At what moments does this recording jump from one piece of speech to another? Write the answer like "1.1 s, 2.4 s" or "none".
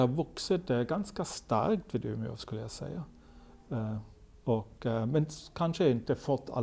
none